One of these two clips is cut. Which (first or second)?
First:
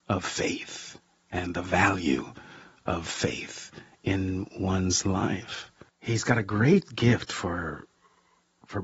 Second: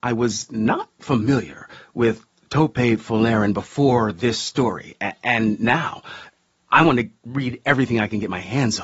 first